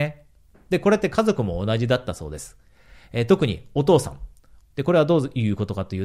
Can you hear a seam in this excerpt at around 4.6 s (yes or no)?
yes